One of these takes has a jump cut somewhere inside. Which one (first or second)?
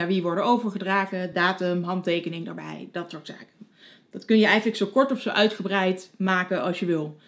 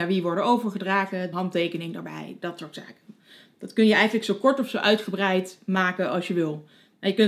second